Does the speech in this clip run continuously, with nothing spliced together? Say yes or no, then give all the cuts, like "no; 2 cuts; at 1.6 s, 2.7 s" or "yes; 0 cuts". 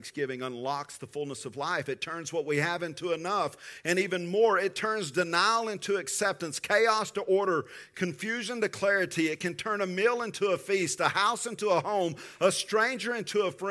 yes; 0 cuts